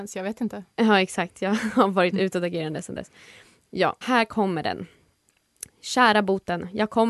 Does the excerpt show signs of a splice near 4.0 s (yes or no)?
yes